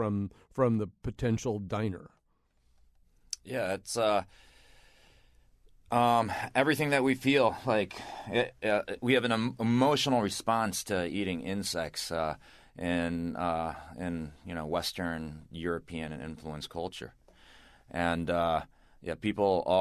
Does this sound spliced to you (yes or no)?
no